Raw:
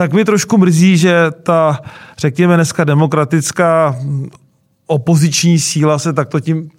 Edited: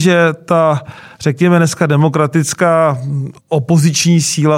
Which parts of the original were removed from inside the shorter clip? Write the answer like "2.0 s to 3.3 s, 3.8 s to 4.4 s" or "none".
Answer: 4.4 s to 4.8 s